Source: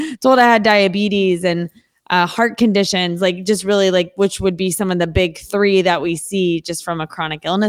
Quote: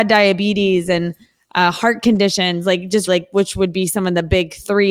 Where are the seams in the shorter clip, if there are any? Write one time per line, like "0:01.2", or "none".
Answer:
0:03.1